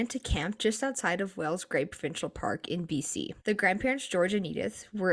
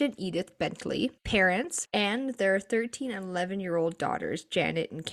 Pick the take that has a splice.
second; 1 cut; at 1.9 s

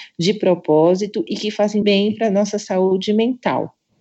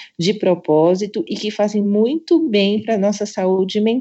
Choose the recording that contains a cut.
first; 1 cut; at 1.8 s

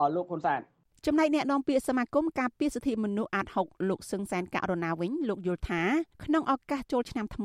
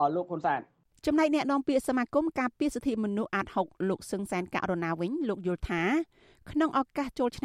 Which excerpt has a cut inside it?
first; 1 cut; at 6.1 s

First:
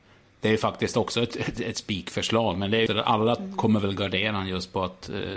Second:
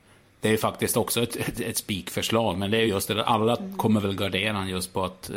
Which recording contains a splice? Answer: first; 1 cut; at 2.9 s

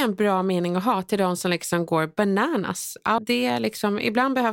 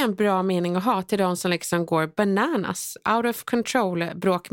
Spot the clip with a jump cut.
first; 1 cut; at 3.2 s

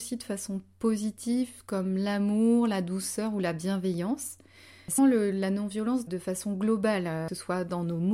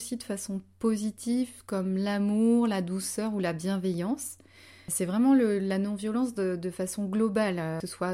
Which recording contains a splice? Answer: first; 2 cuts; at 5.0 s, 6.1 s

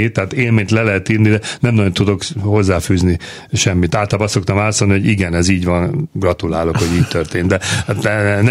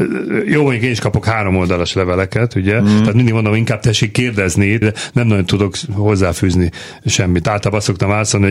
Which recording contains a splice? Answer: second; 1 cut; at 4.8 s

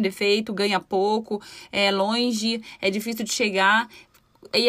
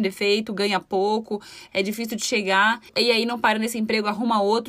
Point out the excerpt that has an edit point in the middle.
second; 2 cuts; at 1.7 s, 2.9 s

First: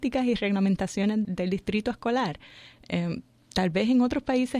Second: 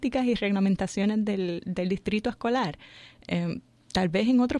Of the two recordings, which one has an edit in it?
first; 1 cut; at 1.2 s

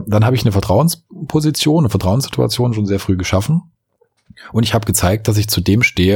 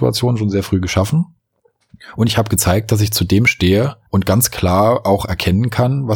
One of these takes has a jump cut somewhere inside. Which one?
second; 1 cut; at 4.1 s

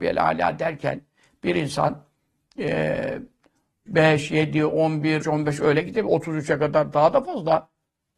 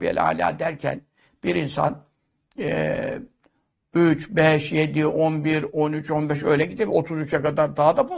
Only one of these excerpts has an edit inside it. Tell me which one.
first; 2 cuts; at 3.9 s, 5.2 s

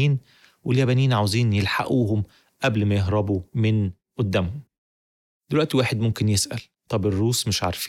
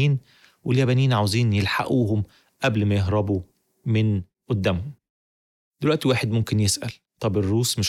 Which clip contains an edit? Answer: first; 1 cut; at 3.5 s

